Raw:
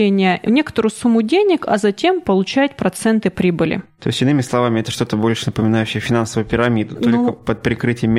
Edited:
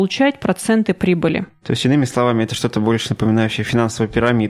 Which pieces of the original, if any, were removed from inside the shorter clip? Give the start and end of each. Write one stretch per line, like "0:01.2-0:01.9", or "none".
none